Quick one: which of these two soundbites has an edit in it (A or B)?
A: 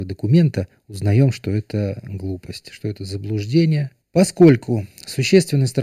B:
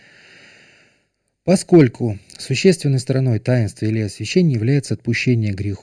A